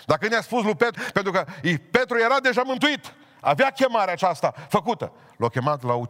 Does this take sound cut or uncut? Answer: cut